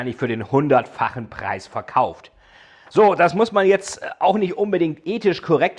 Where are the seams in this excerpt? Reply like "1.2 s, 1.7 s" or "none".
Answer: none

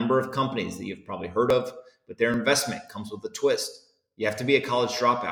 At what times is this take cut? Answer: none

